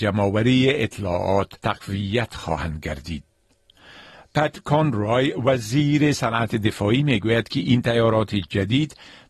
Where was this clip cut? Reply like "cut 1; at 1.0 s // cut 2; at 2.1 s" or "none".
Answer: cut 1; at 1.6 s